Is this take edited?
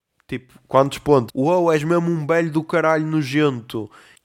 yes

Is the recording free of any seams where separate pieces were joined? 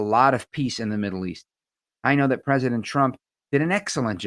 yes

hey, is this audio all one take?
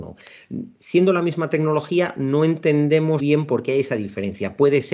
no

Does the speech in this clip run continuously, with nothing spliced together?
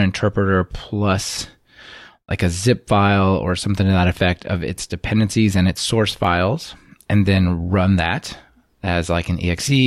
yes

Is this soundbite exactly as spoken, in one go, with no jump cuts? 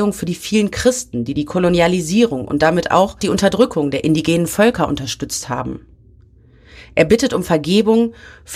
yes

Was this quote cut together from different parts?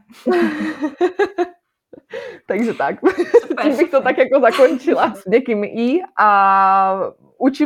yes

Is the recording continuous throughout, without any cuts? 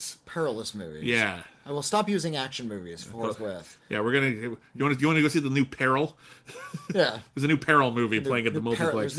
yes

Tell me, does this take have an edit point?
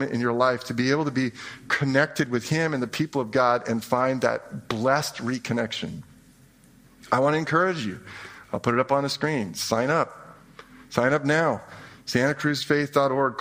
no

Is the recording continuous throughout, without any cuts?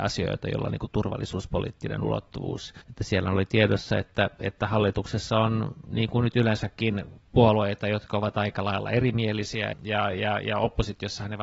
no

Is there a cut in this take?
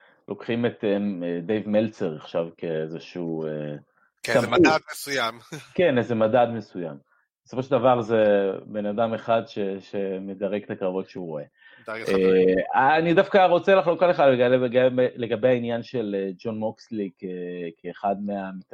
no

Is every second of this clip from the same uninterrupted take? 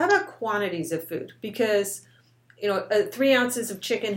yes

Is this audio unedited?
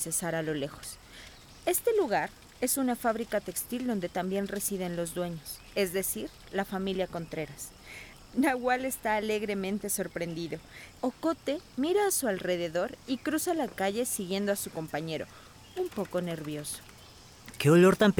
no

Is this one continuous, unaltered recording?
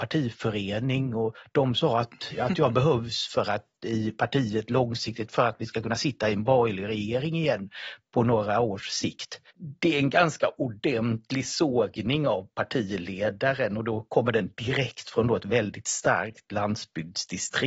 no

